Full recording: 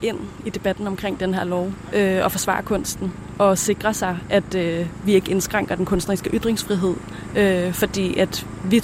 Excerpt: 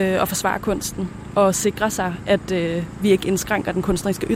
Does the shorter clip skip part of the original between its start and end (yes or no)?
no